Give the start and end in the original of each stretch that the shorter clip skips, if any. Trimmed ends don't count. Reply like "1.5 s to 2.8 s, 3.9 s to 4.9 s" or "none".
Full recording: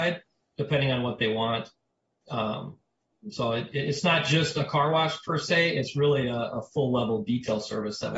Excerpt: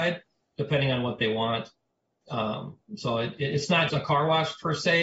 2.9 s to 3.2 s, 4.2 s to 4.5 s